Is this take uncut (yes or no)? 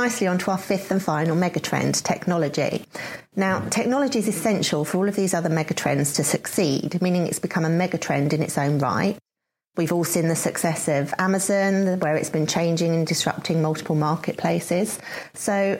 yes